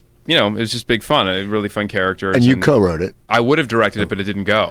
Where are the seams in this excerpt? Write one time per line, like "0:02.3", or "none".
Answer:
0:03.3